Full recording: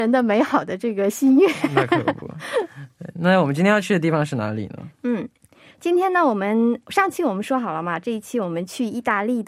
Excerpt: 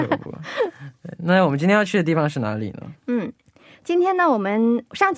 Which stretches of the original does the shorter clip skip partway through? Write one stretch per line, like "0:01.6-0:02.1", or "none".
none

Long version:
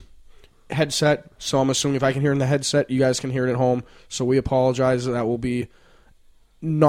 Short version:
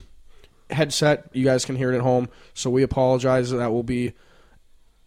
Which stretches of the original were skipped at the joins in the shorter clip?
0:01.3-0:02.9

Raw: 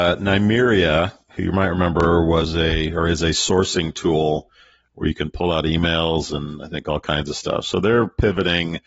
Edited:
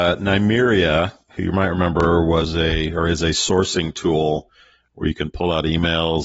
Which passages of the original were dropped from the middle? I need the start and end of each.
none

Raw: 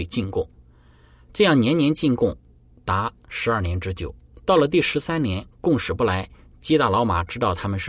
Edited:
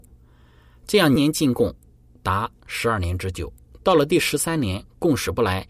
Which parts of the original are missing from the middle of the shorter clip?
0:01.6-0:01.8

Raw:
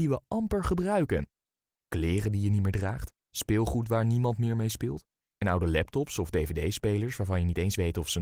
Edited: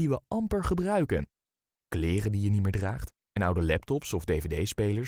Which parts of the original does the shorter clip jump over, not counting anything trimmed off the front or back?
0:03.2-0:05.3

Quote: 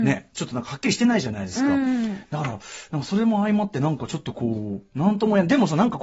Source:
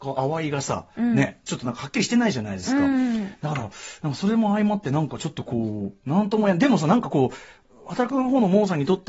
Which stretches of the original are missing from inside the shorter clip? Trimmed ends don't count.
none

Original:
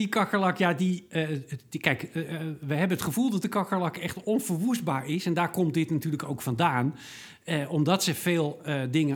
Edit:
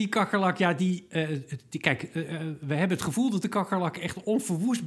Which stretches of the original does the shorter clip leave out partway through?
none

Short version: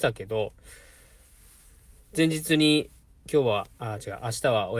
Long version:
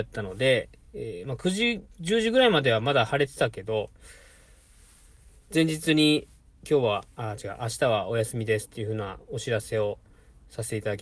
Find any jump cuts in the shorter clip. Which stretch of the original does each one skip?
none

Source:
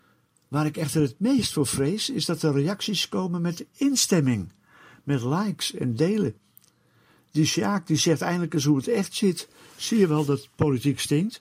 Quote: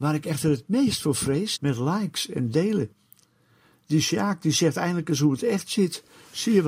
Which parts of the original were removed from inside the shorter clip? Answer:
0:02.1-0:05.0

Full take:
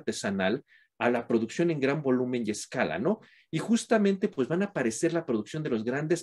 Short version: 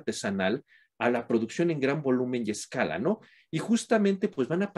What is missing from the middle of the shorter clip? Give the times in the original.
none

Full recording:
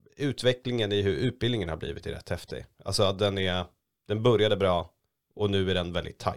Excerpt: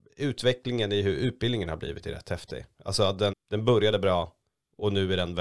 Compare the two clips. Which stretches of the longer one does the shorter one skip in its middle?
0:03.3-0:03.9

